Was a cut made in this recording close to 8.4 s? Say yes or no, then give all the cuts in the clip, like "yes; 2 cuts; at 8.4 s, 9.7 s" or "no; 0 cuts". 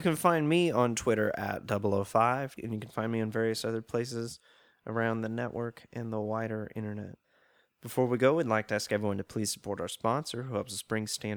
no; 1 cut; at 2.6 s